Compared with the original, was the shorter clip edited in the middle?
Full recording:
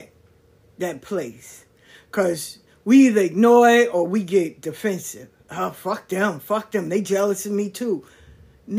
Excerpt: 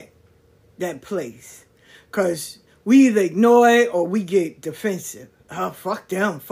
no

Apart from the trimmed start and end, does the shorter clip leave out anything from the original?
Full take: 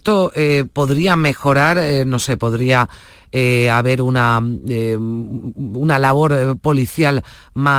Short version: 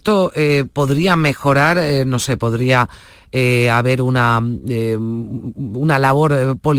no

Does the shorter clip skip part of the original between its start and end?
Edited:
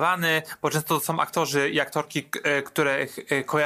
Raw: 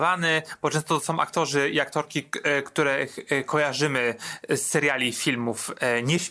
no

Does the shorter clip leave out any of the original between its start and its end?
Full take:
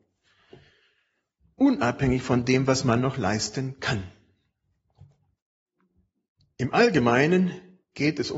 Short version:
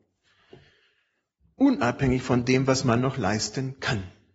no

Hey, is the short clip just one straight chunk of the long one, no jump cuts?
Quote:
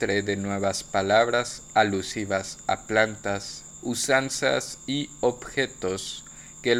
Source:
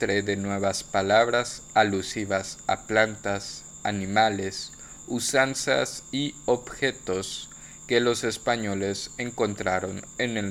no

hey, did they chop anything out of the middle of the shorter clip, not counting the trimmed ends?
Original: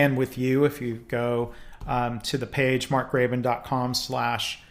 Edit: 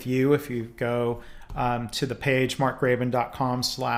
no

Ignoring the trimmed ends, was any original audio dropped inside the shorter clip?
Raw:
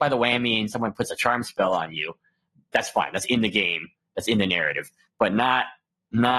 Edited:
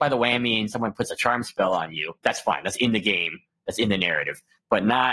yes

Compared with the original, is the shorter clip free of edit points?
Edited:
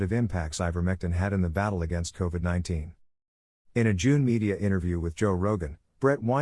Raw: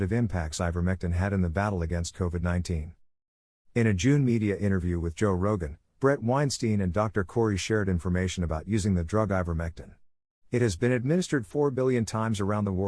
yes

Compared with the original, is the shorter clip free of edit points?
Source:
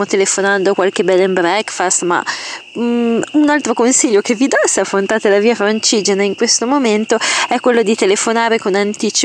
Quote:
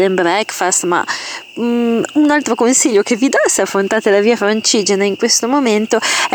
yes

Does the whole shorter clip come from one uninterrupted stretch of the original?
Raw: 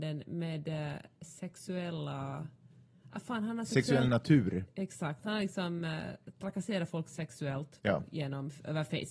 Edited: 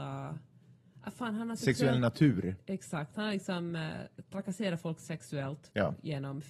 yes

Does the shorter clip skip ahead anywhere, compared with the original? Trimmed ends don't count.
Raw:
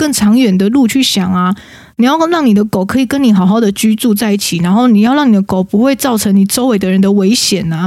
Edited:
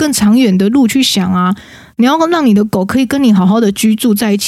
no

